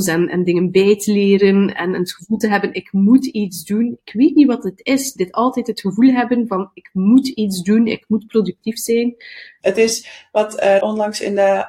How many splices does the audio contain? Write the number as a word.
two